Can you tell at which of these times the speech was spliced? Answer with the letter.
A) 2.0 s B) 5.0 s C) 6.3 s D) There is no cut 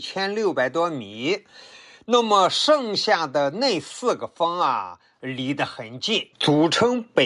C